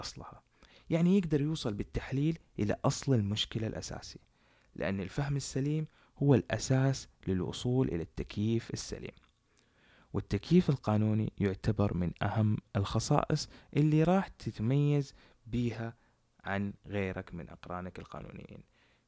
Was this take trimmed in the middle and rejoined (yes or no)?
no